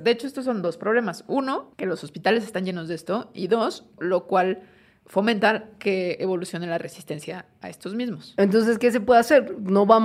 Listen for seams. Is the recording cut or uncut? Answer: cut